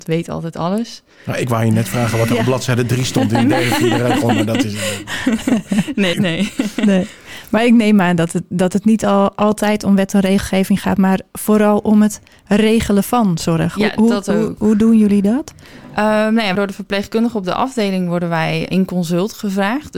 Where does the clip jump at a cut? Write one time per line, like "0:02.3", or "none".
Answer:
0:06.1
0:16.6
0:18.7